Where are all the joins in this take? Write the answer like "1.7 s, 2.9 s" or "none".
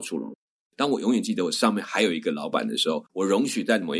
3.1 s